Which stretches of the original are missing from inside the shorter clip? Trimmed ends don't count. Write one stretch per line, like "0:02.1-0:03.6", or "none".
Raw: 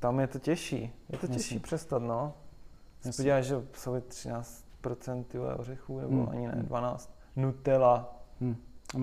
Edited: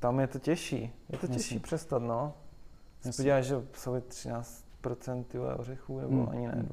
none